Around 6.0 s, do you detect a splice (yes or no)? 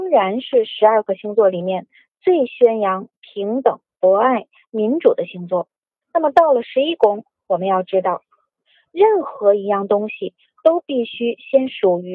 yes